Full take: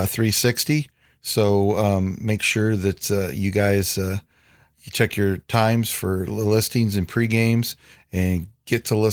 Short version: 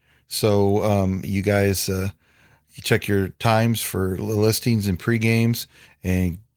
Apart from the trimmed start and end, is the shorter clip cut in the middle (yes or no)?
yes